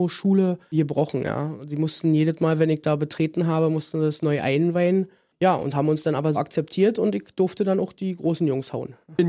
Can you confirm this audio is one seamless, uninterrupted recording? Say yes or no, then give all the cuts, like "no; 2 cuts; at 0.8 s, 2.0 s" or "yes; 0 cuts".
no; 1 cut; at 6.3 s